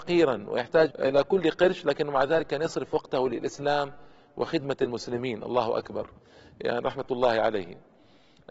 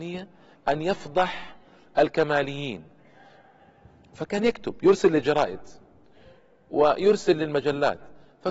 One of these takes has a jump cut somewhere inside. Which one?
first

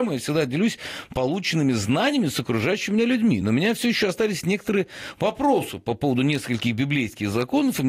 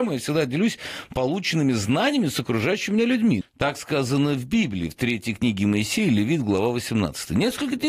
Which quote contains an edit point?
second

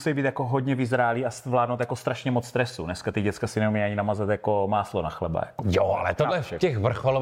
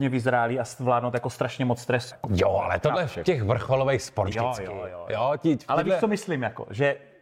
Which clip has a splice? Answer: second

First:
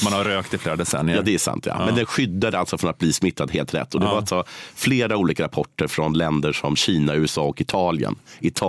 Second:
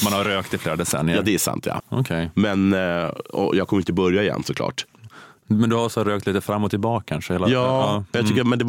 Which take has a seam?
second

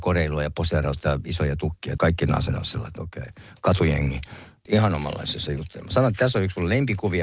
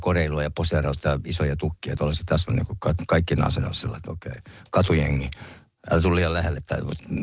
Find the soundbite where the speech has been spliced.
first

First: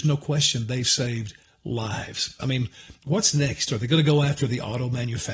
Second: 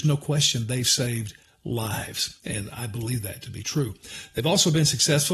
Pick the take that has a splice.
first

